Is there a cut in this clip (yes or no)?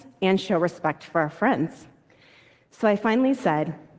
no